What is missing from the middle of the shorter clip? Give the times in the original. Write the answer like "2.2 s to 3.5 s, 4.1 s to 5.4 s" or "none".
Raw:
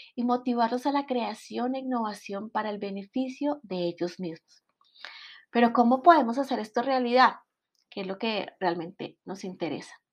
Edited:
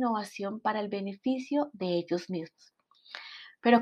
none